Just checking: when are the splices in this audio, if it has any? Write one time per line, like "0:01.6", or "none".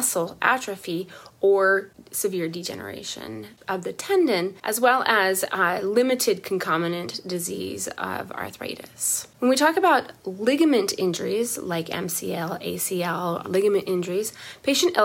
0:13.4

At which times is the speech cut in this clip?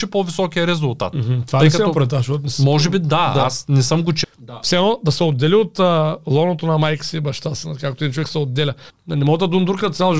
0:04.2
0:08.9

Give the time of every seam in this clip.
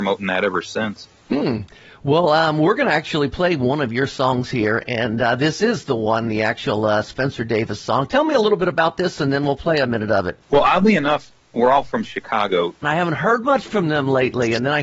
0:10.4
0:12.8

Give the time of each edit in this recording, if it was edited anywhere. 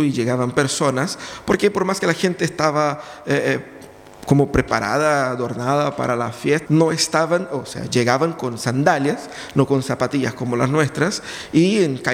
0:06.7

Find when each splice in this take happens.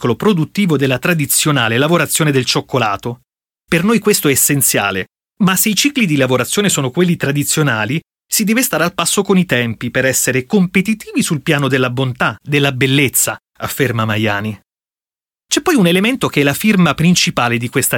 0:12.4

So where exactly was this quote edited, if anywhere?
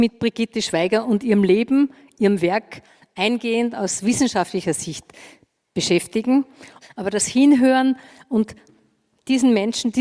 0:06.8

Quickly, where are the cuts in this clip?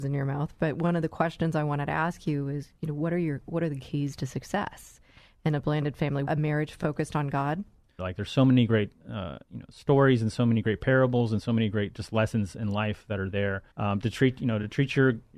0:06.3
0:08.0
0:13.7

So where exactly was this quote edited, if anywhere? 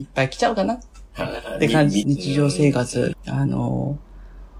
0:02.0
0:03.1

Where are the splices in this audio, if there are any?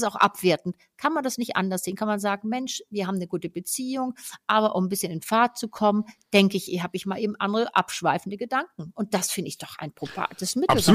none

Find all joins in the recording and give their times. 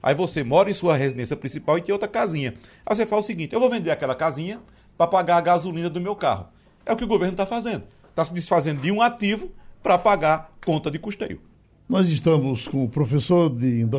none

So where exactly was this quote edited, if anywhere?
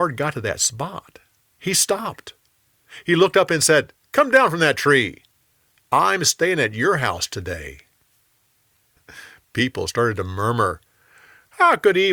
0:04.1
0:09.0

